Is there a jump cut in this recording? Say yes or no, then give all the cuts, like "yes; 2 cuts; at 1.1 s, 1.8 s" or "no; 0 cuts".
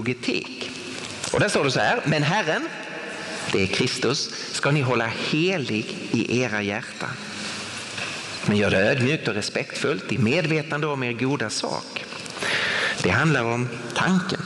yes; 2 cuts; at 8.4 s, 13.0 s